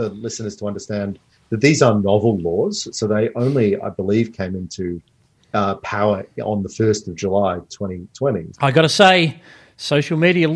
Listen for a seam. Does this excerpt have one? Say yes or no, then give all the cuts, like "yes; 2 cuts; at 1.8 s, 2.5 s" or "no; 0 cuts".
yes; 1 cut; at 8.5 s